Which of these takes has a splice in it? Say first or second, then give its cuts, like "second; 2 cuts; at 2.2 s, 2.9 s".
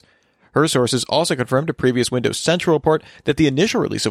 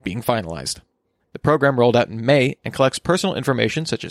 second; 1 cut; at 1.2 s